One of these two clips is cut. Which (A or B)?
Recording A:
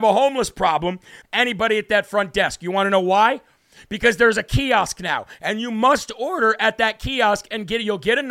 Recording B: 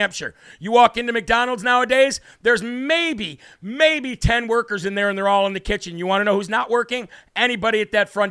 A